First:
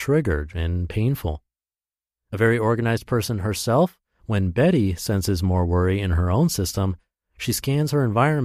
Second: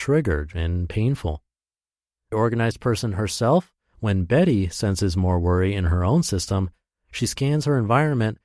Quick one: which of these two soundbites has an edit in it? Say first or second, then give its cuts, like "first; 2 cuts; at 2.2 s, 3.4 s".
second; 1 cut; at 2.3 s